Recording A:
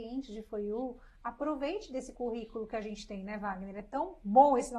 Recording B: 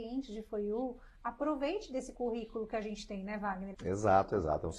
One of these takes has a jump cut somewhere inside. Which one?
B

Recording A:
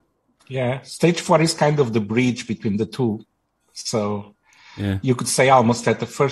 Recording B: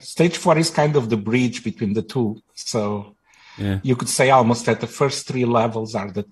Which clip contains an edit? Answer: B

